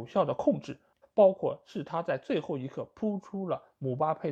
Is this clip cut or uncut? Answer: cut